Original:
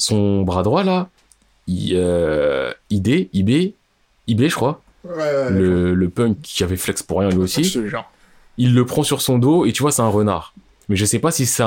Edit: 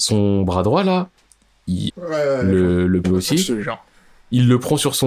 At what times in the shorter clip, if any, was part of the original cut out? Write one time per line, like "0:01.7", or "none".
0:01.9
0:03.0